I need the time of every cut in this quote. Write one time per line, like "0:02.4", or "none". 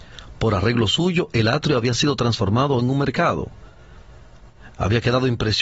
0:04.7